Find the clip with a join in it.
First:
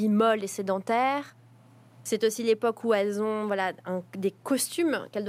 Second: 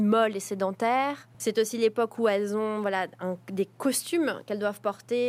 second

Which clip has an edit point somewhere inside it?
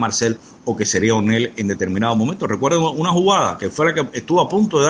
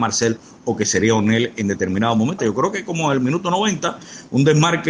second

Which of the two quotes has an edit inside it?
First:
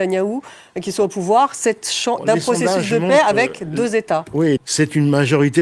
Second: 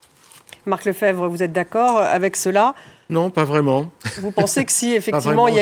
first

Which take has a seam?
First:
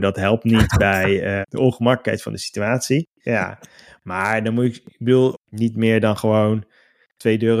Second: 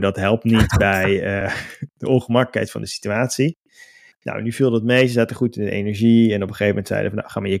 first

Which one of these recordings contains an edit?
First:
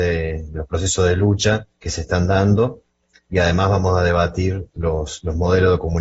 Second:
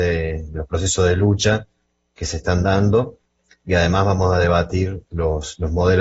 first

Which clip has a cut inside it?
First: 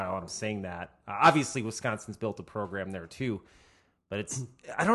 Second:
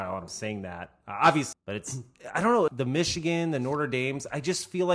second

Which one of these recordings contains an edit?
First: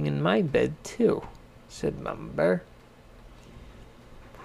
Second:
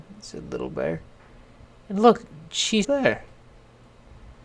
second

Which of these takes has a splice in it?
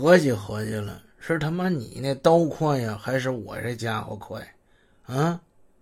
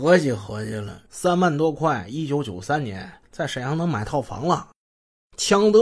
second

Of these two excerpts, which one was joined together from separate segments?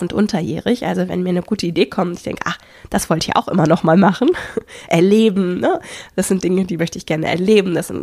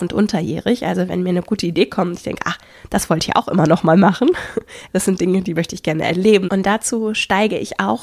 second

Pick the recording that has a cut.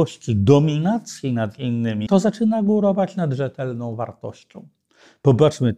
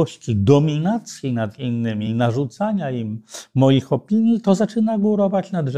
first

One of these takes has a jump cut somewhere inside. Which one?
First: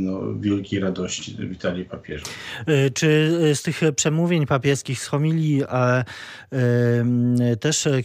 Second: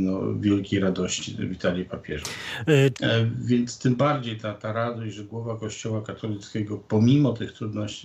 second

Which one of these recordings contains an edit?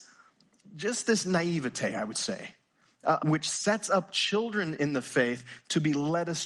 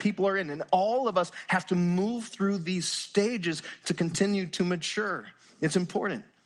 first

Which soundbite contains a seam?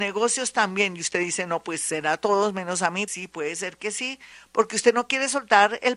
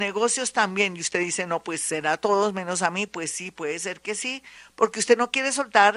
first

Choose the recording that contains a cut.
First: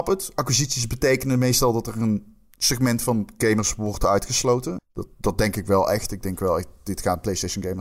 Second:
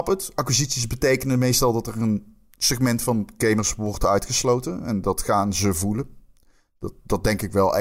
first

